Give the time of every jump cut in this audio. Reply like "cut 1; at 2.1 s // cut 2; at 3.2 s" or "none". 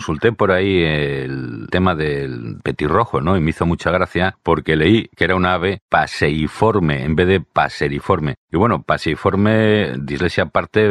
none